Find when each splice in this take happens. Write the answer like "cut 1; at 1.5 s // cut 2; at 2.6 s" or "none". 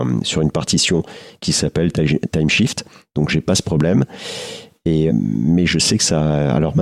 cut 1; at 5.1 s